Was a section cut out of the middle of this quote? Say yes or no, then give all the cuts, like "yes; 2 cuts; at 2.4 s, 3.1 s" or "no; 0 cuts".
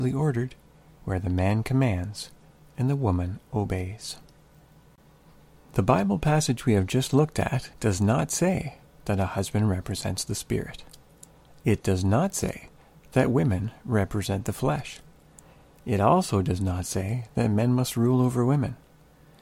yes; 1 cut; at 7.7 s